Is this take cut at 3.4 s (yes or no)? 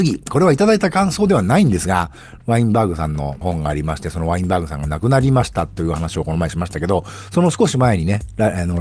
yes